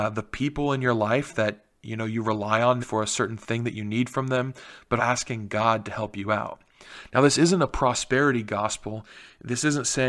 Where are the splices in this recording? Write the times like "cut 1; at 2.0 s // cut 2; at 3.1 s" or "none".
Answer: cut 1; at 2.8 s // cut 2; at 5.0 s